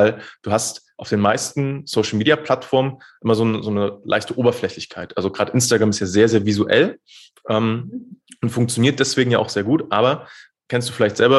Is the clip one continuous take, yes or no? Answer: yes